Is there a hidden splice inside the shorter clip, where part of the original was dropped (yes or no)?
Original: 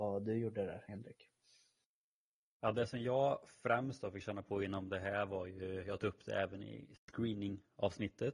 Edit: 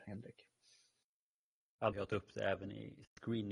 yes